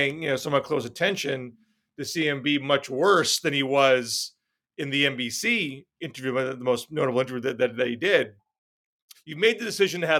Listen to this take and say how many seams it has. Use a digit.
1